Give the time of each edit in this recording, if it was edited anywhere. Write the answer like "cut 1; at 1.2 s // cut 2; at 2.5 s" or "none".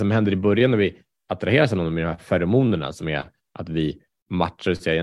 none

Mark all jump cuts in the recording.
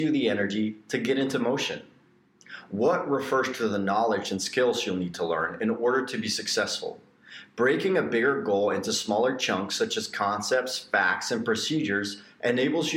none

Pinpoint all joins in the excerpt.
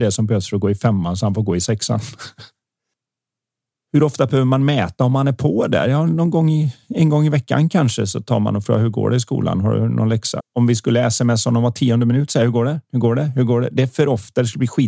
cut 1; at 10.4 s

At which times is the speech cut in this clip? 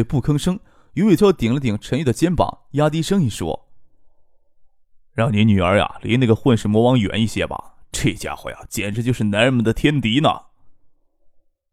cut 1; at 1.2 s

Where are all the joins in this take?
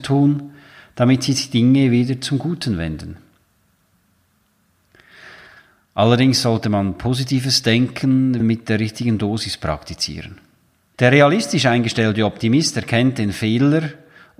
cut 1; at 8.4 s // cut 2; at 10.9 s

